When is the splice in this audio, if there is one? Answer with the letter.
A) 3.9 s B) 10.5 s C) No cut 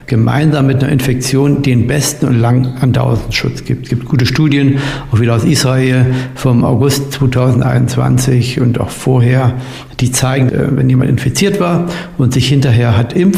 B